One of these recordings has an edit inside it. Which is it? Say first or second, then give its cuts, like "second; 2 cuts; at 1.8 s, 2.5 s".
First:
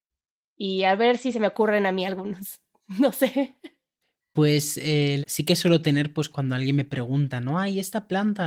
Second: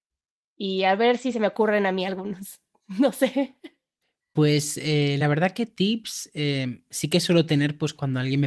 first; 1 cut; at 5.2 s